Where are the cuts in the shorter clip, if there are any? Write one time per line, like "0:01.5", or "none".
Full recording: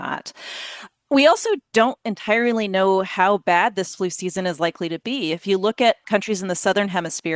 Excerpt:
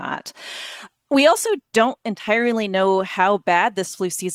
none